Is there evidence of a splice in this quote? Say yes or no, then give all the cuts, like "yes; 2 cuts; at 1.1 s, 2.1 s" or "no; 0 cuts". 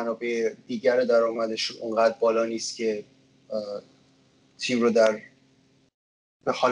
no; 0 cuts